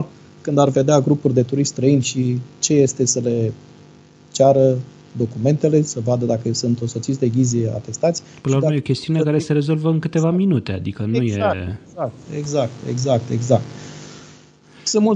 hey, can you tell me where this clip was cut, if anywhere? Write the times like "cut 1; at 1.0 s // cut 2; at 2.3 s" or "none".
none